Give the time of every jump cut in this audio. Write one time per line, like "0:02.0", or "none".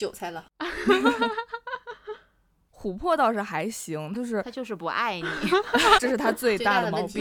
0:04.2
0:06.0